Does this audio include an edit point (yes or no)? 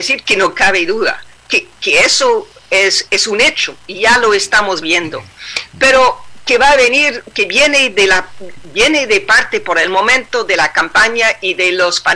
yes